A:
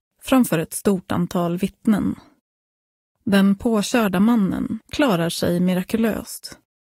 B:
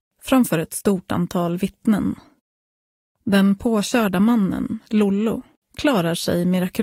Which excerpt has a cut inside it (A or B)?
A